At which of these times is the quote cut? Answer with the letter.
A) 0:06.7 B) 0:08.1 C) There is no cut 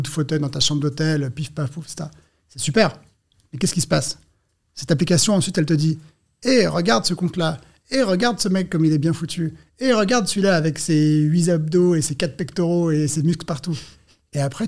C